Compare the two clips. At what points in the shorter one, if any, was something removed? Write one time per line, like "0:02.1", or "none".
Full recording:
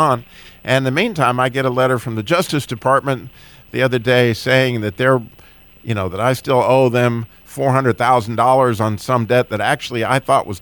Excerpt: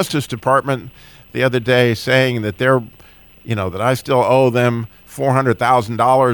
none